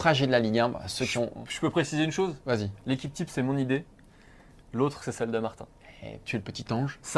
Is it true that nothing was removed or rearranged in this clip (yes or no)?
yes